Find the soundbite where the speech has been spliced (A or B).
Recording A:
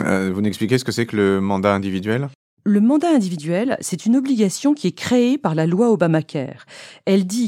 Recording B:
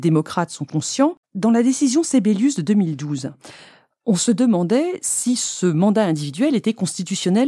B